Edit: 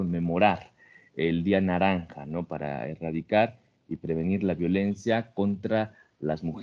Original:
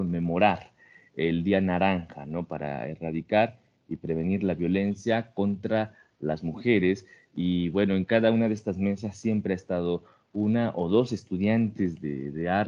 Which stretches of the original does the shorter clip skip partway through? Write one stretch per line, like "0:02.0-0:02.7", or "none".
none

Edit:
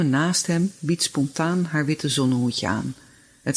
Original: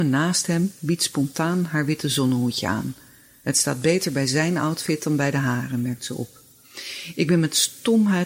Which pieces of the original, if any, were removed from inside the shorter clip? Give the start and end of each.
none

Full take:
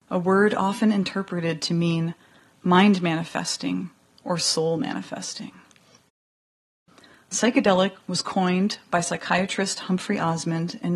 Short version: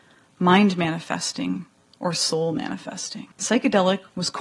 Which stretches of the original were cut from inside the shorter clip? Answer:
0:05.6-0:07.2

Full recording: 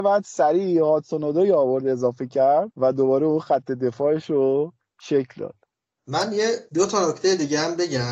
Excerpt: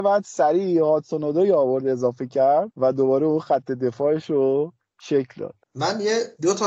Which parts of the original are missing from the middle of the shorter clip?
0:05.6-0:06.0

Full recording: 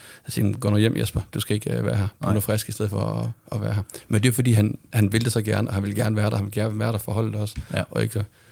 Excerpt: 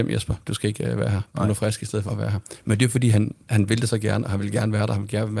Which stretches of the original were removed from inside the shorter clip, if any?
0:02.9-0:03.5

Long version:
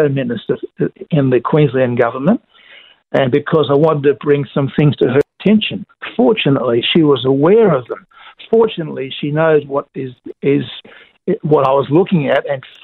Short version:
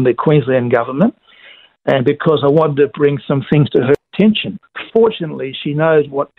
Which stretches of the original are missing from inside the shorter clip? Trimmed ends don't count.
0:06.2-0:08.5

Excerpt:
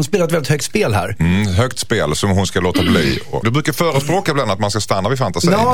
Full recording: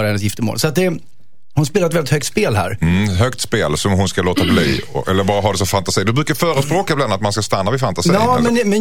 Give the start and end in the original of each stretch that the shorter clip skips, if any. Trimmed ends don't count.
0:05.0-0:06.0

